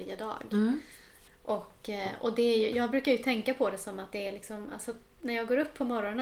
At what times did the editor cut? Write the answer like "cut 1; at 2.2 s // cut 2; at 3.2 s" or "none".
none